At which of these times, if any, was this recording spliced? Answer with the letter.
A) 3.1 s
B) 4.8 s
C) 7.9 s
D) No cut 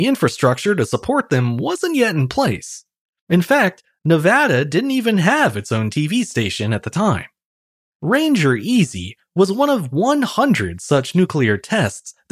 C